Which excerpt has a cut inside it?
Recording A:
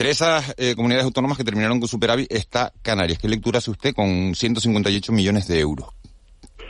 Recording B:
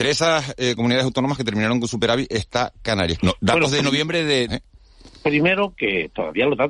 B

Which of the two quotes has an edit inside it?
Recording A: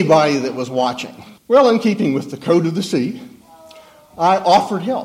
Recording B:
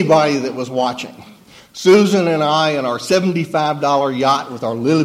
A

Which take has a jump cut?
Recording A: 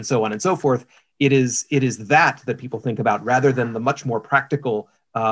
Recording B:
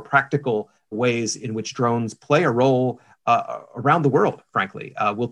B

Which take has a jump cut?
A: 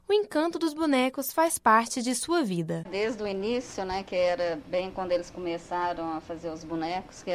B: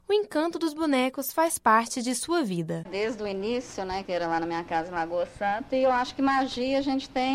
B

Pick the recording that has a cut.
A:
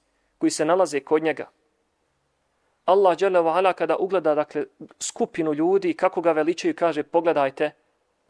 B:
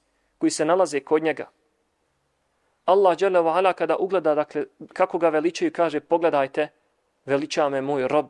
B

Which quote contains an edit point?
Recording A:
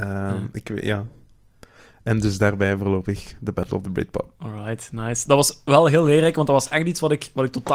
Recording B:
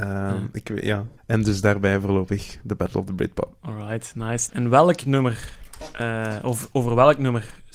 B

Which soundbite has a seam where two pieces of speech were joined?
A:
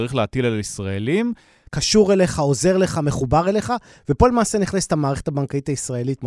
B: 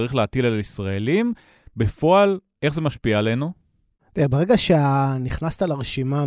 A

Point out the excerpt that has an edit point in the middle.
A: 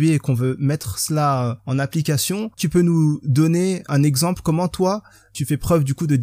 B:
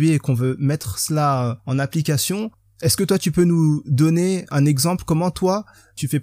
A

